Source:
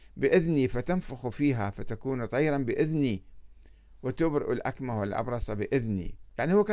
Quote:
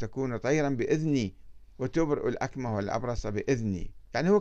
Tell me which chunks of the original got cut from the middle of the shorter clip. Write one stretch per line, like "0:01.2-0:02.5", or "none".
0:03.6-0:03.9